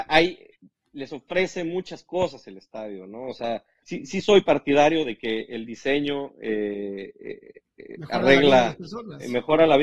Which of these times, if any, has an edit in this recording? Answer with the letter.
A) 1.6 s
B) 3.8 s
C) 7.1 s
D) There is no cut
B